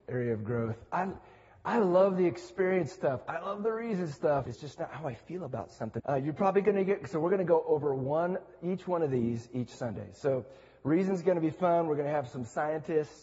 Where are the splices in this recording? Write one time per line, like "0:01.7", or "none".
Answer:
0:04.5
0:06.0